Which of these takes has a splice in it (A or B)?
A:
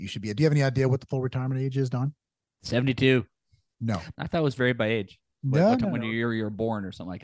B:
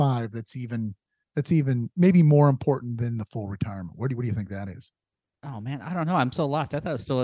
A